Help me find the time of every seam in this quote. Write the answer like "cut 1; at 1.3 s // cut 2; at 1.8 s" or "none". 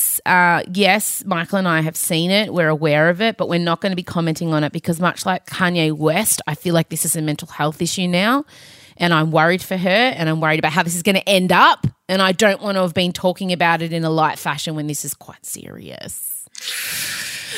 none